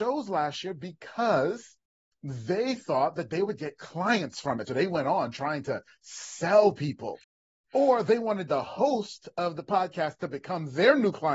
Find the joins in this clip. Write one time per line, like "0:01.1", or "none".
none